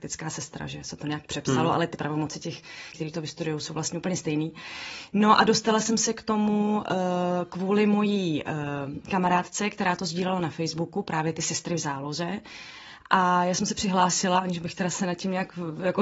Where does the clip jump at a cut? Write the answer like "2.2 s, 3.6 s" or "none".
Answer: 2.9 s

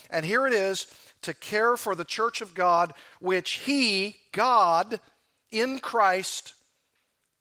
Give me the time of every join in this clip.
none

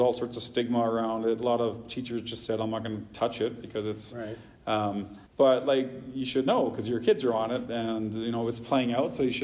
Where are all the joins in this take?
5.3 s

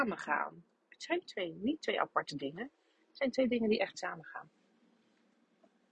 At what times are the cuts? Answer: none

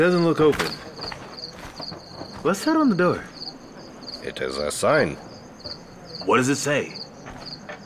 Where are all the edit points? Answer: none

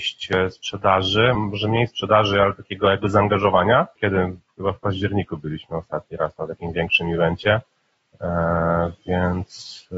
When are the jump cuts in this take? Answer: 1.3 s, 4.0 s

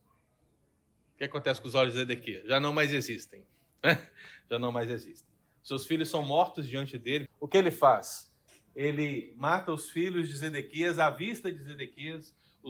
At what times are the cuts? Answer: 7.2 s

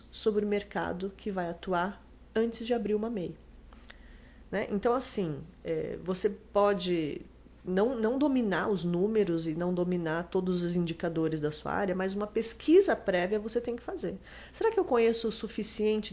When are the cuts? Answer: none

